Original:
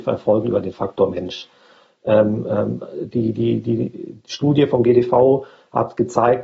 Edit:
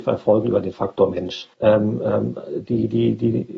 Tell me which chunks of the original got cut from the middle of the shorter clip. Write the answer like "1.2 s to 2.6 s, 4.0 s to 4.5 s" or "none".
1.5 s to 2.0 s